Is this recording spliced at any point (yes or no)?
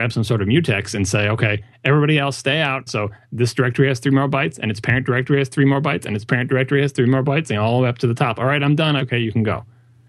yes